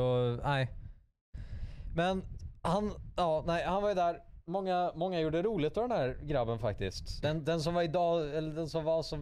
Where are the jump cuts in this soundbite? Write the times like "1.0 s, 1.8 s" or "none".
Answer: 7.2 s

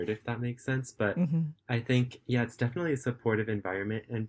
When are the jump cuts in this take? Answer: none

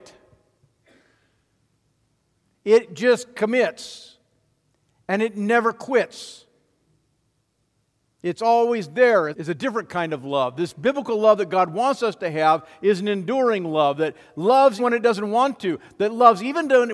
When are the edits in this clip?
9.3 s, 14.8 s

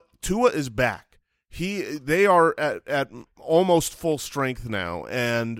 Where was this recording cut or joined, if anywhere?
none

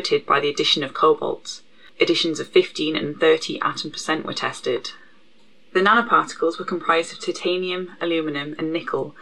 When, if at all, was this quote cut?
none

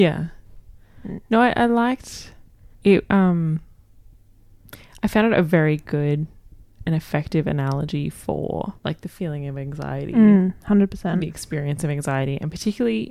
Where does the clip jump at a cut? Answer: 2.7 s, 8.8 s

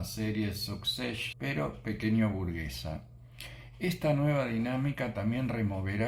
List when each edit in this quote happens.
1.3 s

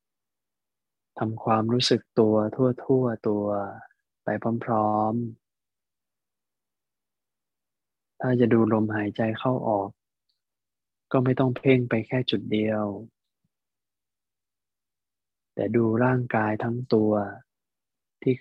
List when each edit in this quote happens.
none

